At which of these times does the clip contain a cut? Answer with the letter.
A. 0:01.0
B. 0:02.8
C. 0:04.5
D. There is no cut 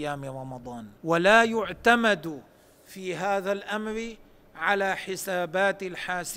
A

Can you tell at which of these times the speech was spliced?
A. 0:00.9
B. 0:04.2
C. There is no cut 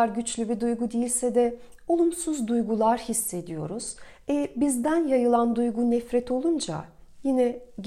C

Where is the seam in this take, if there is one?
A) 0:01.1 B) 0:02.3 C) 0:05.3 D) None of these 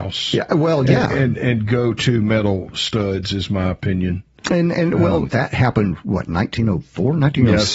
C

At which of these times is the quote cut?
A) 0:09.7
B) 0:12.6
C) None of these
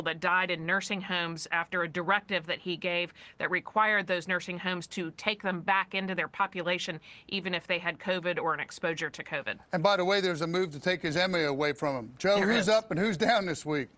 C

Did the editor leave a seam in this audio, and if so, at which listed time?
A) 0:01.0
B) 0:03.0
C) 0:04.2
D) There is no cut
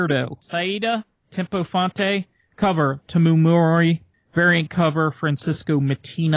B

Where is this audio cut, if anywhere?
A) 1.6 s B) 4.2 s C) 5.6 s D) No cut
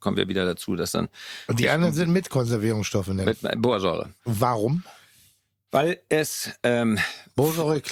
B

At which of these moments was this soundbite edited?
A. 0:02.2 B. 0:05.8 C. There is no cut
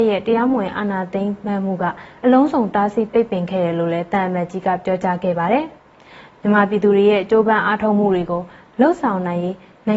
B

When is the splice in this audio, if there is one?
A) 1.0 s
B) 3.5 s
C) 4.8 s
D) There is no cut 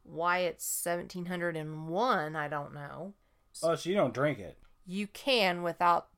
B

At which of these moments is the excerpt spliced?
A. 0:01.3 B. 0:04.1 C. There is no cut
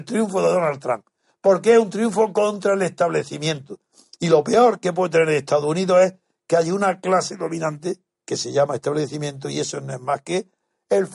C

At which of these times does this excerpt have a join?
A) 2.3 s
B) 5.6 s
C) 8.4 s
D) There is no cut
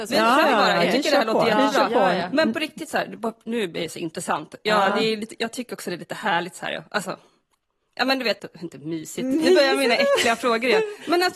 C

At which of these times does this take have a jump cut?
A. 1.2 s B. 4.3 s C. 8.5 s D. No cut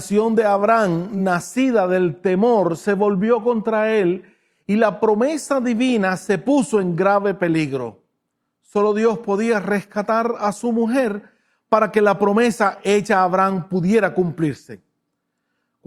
D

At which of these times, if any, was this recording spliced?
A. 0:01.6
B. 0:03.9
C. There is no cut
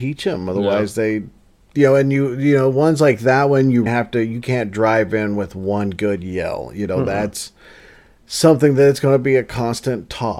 B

